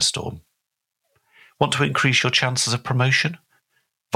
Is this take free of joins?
yes; 0 cuts

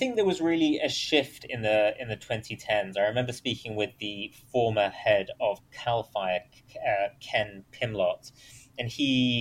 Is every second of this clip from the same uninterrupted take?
yes; 0 cuts

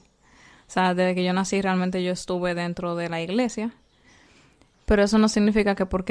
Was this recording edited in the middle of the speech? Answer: no; 0 cuts

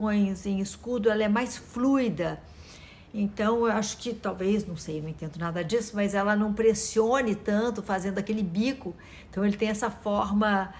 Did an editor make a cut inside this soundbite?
no; 0 cuts

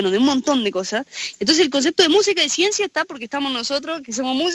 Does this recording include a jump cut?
yes; 1 cut; at 1.3 s

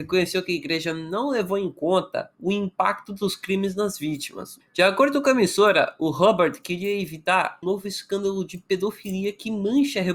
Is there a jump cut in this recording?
yes; 3 cuts; at 2.3 s, 4.6 s, 7.6 s

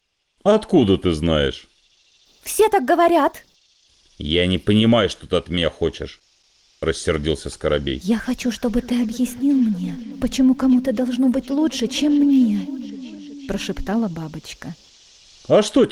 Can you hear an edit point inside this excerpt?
no; 0 cuts

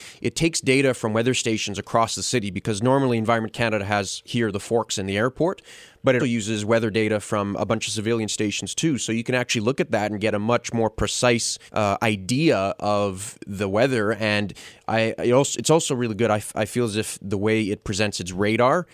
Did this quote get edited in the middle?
yes; 2 cuts; at 6.2 s, 11.7 s

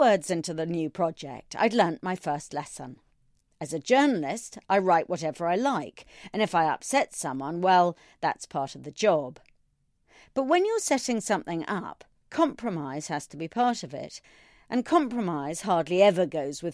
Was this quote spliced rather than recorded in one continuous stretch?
no; 0 cuts

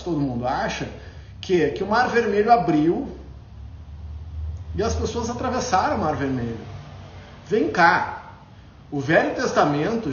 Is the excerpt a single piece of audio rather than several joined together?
yes; 0 cuts

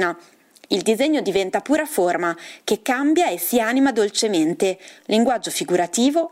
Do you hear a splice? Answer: yes; 1 cut; at 5.0 s

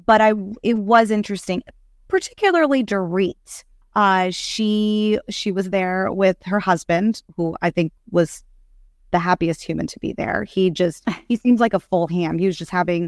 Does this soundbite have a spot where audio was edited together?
yes; 1 cut; at 3.8 s

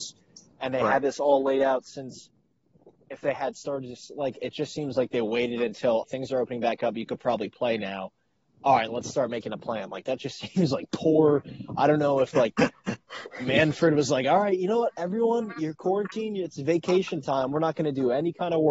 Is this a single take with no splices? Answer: no; 1 cut; at 6.0 s

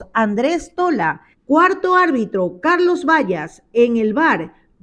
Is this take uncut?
yes; 0 cuts

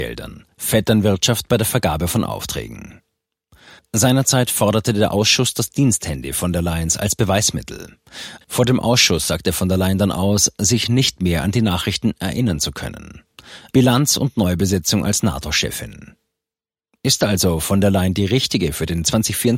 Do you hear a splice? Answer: yes; 2 cuts; at 8.4 s, 13.7 s

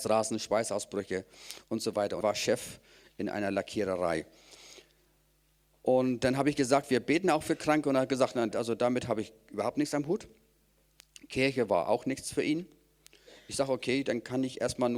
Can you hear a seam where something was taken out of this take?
yes; 2 cuts; at 2.2 s, 8.5 s

